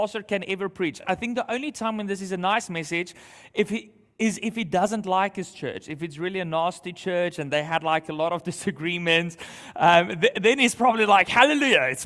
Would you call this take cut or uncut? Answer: uncut